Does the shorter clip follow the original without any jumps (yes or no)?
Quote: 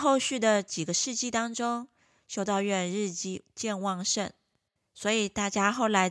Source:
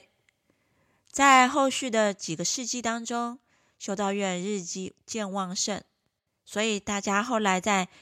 yes